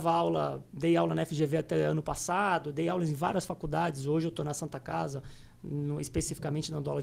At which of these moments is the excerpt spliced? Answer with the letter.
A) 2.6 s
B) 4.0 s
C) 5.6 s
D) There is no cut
D